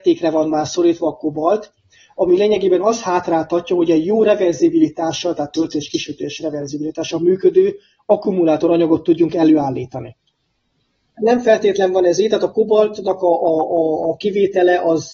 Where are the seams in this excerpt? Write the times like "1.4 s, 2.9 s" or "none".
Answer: 11.2 s